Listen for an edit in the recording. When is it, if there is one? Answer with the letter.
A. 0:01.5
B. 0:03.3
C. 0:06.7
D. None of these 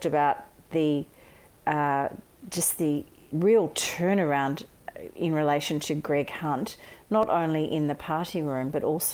B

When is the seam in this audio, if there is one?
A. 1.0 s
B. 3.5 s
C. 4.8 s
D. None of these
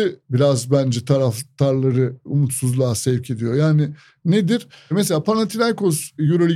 D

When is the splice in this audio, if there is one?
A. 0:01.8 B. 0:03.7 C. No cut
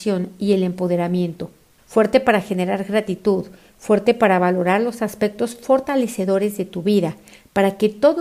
A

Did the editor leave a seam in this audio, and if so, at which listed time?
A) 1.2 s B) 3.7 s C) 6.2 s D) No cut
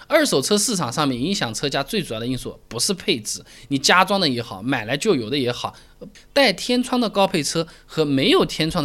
C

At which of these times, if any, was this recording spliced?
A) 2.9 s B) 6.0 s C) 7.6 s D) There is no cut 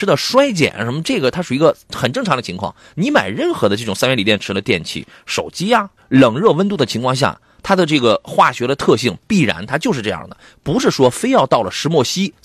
B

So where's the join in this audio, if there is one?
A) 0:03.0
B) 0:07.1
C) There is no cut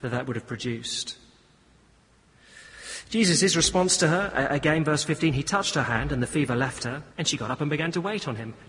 B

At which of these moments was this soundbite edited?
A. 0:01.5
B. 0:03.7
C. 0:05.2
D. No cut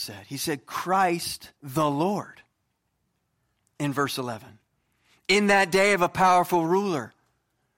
A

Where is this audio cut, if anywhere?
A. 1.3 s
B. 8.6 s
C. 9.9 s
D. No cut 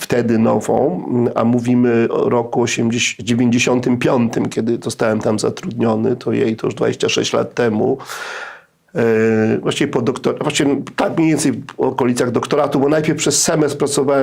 D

